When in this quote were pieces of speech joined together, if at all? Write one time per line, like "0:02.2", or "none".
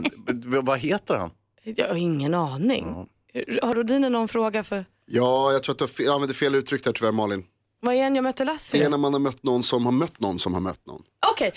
none

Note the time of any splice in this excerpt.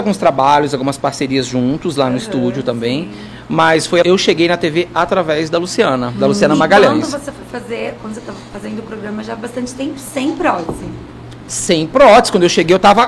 0:04.0
0:08.0

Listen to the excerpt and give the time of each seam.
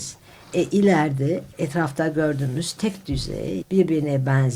0:01.5
0:03.6

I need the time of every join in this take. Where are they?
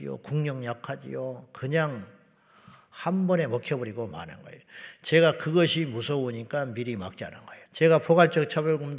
0:07.7

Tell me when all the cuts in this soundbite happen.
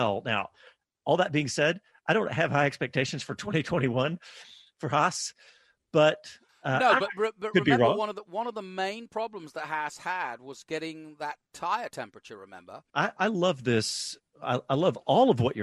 0:12.9

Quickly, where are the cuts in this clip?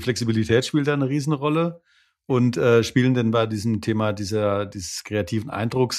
none

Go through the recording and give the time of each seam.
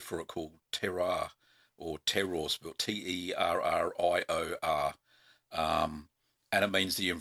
none

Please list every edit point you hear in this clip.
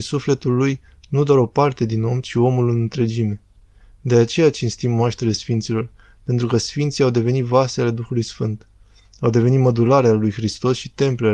none

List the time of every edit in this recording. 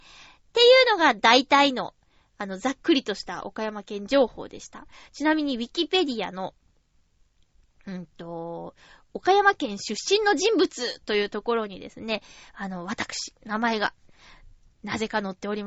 none

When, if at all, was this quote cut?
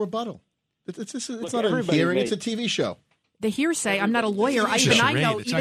none

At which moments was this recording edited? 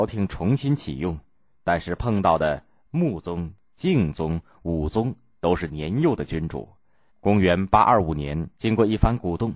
0:07.1
0:08.6

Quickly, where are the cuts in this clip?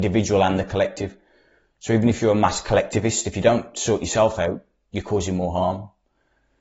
none

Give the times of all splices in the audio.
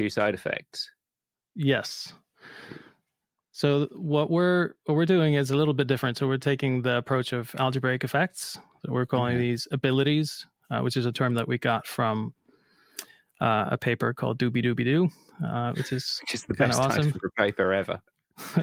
none

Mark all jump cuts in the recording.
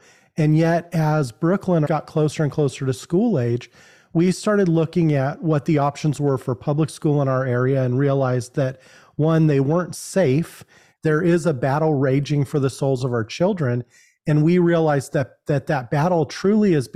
0:01.8
0:11.0

